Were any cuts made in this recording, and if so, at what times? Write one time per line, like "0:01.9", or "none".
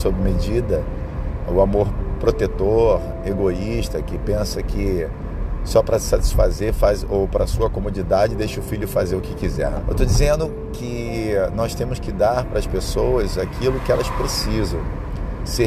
0:09.8